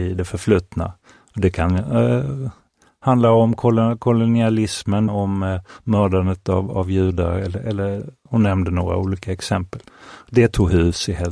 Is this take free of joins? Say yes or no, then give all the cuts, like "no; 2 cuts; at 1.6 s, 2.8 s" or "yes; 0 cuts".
no; 1 cut; at 5.1 s